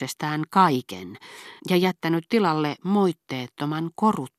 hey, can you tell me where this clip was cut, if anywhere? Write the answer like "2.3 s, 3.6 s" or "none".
1.6 s